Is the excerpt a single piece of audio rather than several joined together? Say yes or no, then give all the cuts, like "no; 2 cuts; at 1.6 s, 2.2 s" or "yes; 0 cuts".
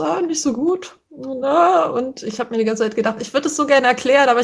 yes; 0 cuts